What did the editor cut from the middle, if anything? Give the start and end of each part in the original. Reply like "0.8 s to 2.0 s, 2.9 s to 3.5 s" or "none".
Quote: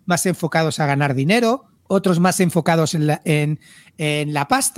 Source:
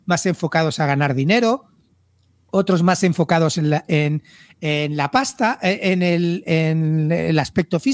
1.8 s to 2.4 s